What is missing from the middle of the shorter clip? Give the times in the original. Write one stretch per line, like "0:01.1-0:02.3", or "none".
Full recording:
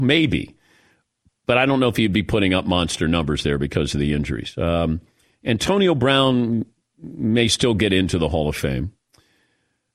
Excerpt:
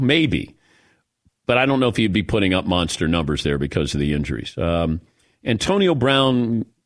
none